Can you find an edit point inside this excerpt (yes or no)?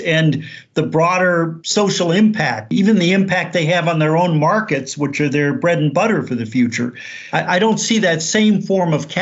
no